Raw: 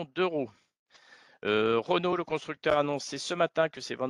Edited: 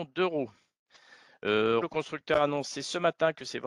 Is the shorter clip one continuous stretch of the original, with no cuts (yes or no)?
no